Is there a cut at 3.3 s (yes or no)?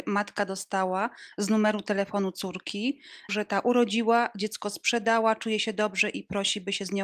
yes